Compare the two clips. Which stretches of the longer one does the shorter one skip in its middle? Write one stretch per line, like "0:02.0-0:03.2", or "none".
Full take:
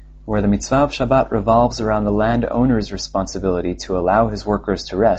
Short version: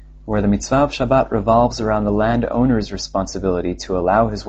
none